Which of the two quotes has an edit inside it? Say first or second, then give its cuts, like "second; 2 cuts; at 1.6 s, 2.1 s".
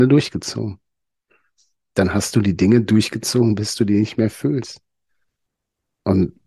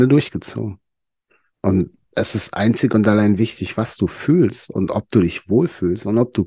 second; 1 cut; at 1.5 s